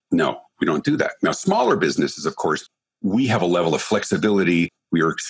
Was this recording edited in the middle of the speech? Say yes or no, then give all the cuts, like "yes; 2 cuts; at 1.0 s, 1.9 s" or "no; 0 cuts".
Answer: no; 0 cuts